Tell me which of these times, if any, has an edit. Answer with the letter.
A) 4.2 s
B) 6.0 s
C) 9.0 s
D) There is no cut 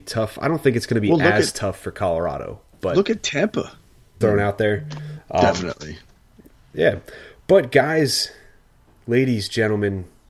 A